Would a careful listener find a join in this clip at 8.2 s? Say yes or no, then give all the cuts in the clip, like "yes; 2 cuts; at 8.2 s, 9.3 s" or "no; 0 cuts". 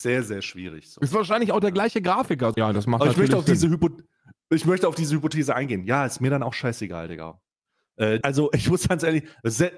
yes; 2 cuts; at 2.5 s, 8.2 s